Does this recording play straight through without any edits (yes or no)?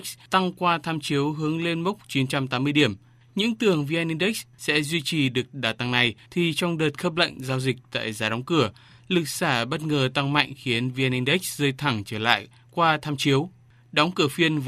yes